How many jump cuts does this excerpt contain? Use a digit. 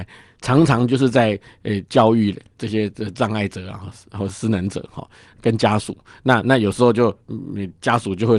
0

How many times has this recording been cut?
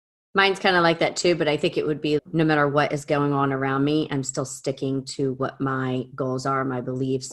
1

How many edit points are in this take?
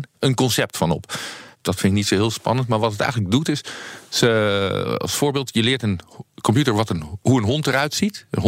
1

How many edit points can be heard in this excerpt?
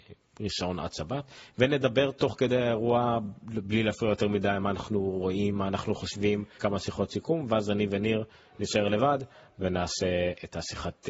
2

